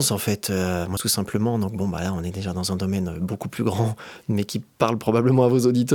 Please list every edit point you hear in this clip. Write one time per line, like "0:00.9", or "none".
0:01.0